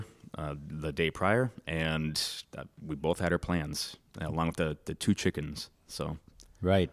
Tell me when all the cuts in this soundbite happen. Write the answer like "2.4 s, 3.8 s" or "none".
none